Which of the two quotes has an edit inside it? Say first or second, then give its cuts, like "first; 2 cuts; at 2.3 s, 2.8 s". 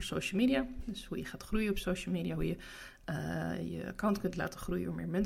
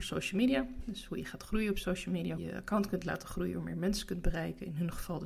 second; 1 cut; at 2.4 s